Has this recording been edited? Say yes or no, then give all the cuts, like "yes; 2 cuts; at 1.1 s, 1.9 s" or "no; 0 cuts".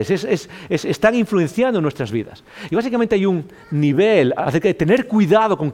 yes; 2 cuts; at 2.7 s, 4.4 s